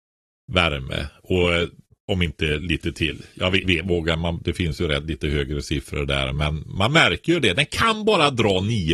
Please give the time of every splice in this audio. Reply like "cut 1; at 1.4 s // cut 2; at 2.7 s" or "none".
cut 1; at 3.6 s